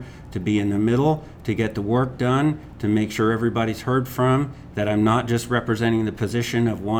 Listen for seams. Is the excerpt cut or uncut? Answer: uncut